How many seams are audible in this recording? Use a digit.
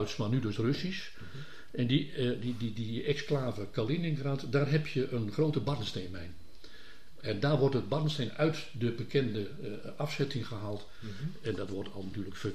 0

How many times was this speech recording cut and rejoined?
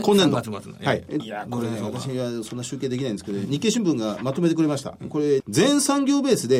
2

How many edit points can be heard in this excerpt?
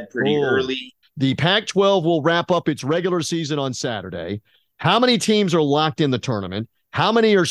1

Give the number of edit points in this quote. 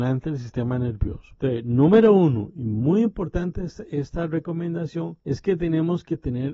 1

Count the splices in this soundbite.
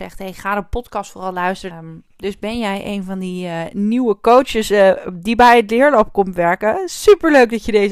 1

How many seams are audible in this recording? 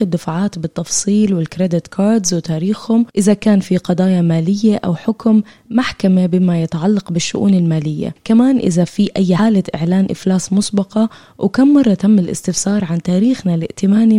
1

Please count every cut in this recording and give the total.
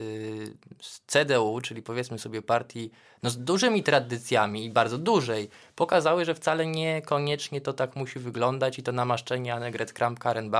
0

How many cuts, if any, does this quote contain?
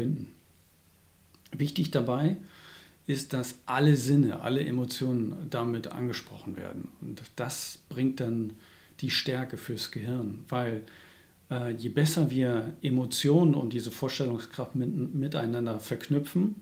0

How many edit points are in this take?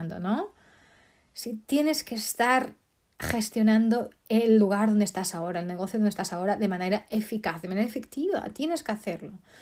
0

